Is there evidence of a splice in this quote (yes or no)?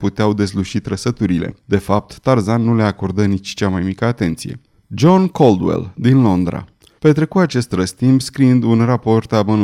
yes